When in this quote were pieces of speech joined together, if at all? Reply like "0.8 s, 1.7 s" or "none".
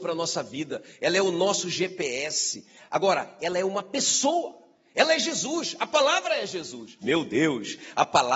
7.0 s